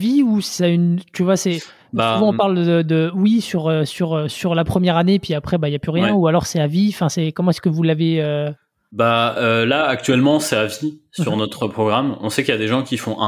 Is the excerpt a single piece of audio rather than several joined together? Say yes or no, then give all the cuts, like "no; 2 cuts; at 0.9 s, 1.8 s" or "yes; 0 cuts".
yes; 0 cuts